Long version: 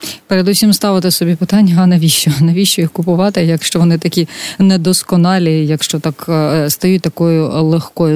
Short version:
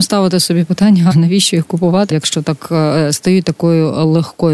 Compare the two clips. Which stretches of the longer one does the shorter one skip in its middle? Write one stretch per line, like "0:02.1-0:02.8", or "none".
0:01.8-0:02.4
0:03.4-0:05.7